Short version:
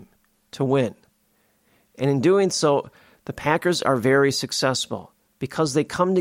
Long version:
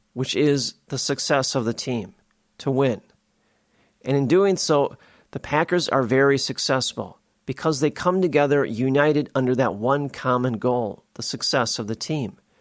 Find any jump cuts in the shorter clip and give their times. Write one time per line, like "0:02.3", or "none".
none